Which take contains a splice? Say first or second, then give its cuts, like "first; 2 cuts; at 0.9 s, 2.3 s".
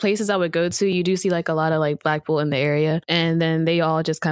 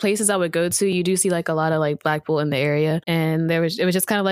second; 1 cut; at 3.0 s